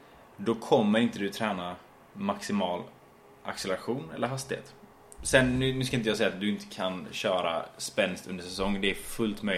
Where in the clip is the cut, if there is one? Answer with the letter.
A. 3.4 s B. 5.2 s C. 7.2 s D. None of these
B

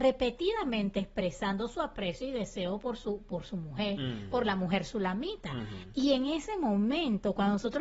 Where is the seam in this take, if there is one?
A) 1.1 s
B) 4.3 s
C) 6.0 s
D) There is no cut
D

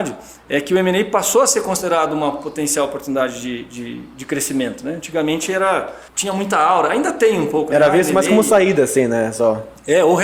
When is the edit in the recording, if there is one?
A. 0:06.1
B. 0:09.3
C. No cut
A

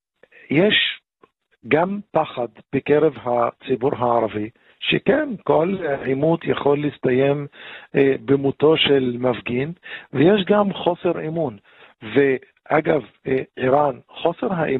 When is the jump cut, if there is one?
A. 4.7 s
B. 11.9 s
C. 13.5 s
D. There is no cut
D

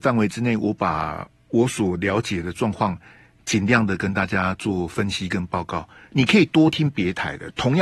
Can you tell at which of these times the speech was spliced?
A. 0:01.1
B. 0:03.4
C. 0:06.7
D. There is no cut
C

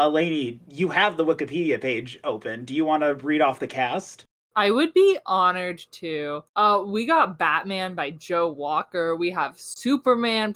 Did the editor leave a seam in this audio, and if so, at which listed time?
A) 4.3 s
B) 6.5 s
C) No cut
B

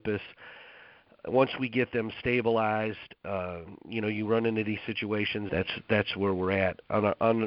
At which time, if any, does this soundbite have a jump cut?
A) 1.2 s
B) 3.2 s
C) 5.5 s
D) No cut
C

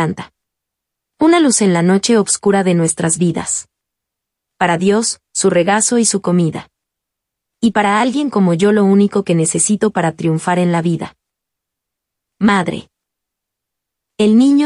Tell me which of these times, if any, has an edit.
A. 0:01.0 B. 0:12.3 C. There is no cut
C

